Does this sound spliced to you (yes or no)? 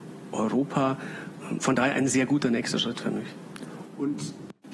yes